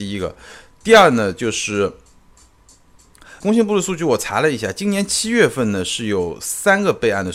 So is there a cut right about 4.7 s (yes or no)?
no